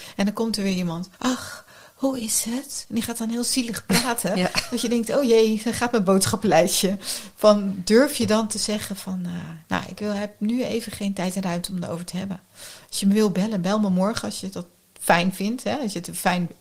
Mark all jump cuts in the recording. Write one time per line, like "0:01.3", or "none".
0:01.1